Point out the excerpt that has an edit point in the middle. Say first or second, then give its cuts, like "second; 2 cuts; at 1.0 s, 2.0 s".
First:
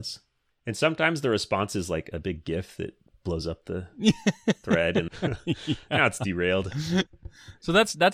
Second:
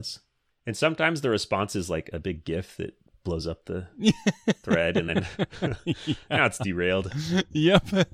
first; 2 cuts; at 5.1 s, 7.1 s